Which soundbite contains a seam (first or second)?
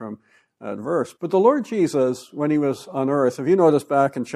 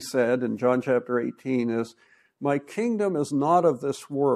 first